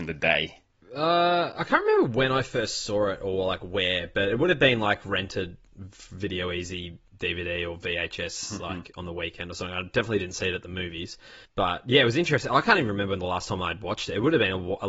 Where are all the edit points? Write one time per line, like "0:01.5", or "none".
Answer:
none